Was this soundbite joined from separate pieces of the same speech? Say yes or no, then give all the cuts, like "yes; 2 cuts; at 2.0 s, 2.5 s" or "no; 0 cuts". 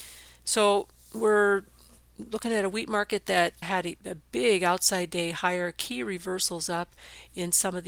yes; 1 cut; at 3.6 s